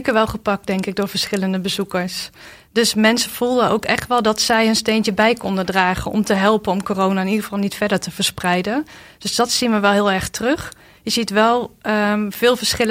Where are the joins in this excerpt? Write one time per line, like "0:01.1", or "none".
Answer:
none